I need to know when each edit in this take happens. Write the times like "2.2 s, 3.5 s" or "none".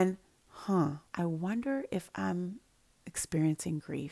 1.1 s

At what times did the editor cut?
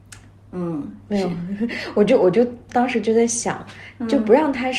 none

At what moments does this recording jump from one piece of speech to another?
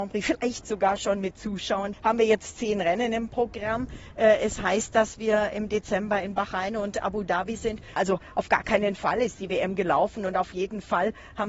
1.9 s, 8.0 s

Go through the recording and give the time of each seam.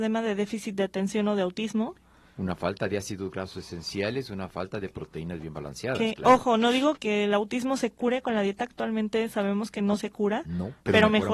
7.0 s

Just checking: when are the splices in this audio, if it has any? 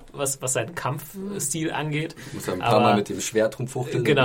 none

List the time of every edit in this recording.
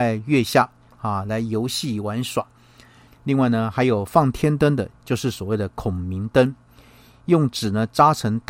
3.1 s

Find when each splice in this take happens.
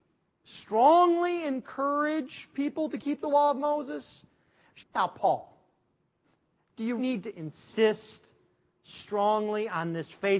4.8 s, 7.0 s

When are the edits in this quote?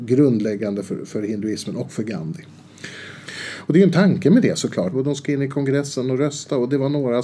3.3 s, 4.9 s

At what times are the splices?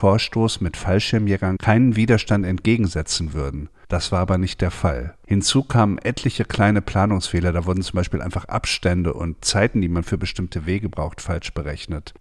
none

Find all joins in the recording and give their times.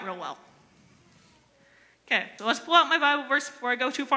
2.4 s

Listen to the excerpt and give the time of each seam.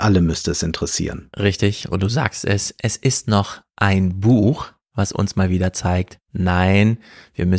none

